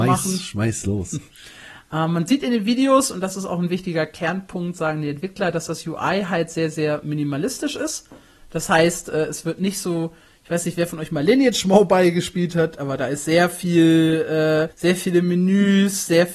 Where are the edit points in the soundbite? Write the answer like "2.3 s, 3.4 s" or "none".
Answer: 14.7 s